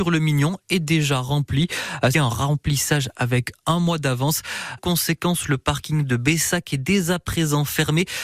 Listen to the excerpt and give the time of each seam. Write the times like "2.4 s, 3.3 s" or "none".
2.1 s, 4.8 s